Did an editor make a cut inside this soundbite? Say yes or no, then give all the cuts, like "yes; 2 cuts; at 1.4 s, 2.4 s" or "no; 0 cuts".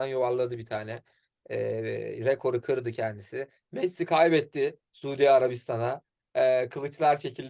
no; 0 cuts